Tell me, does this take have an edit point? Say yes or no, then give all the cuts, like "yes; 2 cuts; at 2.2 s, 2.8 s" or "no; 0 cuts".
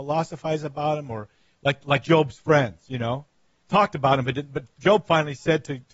yes; 1 cut; at 3.6 s